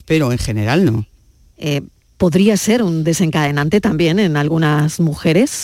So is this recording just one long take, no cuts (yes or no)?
no